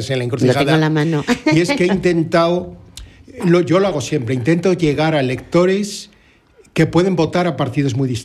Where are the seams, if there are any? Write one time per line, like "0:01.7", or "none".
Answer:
none